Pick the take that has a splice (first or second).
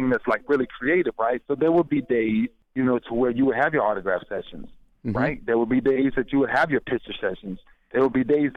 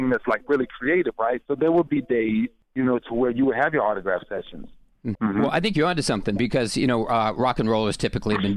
second